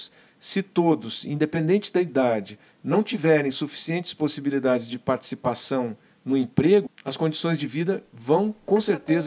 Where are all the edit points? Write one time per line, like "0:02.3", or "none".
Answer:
0:06.9